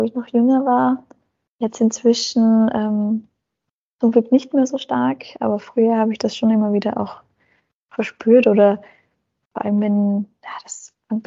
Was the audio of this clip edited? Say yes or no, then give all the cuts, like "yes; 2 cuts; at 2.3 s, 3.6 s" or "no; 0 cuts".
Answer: no; 0 cuts